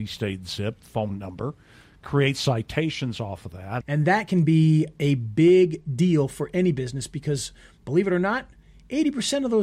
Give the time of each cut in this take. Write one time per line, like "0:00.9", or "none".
0:03.8